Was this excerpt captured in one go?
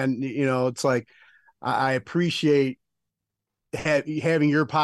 yes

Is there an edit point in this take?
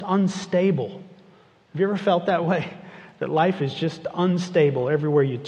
no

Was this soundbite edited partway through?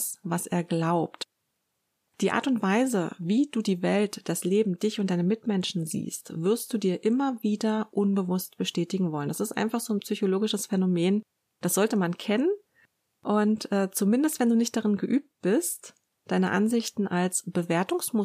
no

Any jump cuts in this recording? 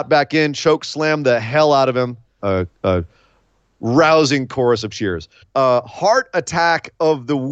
yes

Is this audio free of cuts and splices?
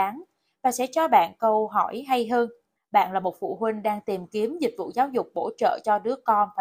no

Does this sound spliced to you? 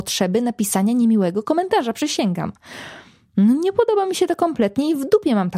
no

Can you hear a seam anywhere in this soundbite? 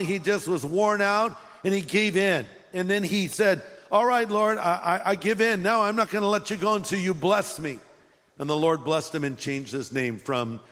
no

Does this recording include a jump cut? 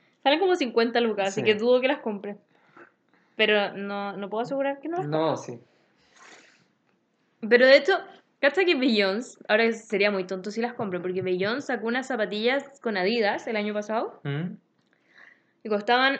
no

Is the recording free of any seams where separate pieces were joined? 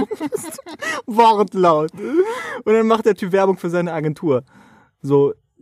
yes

